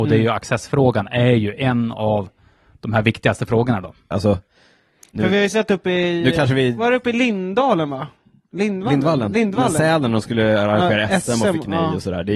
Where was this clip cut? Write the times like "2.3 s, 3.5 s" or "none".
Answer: 4.1 s